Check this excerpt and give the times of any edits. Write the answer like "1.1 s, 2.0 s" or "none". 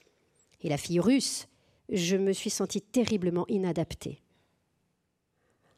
1.8 s